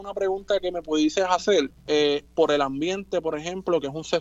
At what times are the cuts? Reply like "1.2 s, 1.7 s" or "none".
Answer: 1.7 s